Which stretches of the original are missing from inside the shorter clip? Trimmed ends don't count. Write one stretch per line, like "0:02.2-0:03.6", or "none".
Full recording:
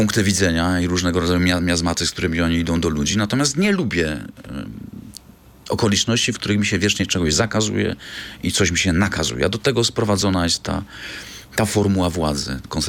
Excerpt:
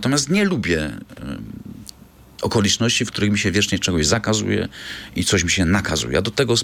none